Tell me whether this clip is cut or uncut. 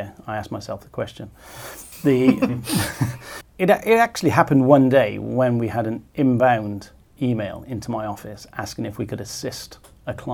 cut